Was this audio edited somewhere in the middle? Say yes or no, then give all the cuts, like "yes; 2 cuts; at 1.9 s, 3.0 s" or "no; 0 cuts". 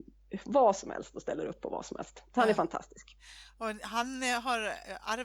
no; 0 cuts